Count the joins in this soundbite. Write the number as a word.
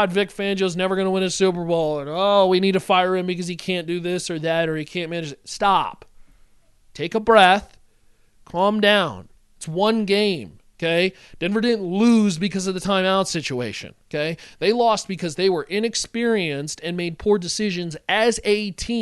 zero